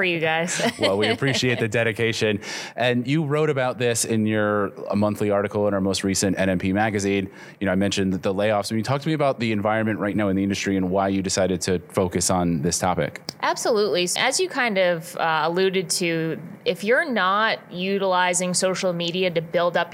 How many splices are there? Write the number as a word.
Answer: one